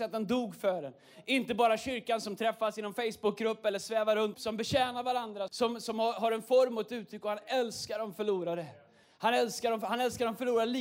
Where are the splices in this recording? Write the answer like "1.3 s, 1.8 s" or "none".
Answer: 4.3 s, 5.5 s, 9.0 s